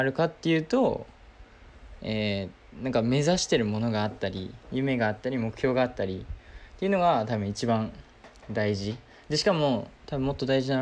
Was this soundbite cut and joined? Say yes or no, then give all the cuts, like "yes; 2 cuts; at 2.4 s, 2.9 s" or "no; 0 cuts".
no; 0 cuts